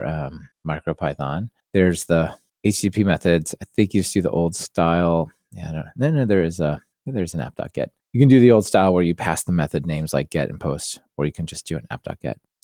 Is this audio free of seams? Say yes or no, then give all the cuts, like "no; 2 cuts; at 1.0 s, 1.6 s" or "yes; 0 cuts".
yes; 0 cuts